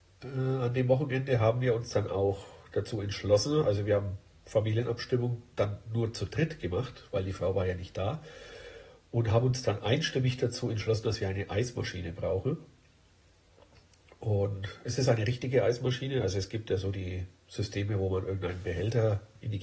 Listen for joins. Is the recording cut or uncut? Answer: uncut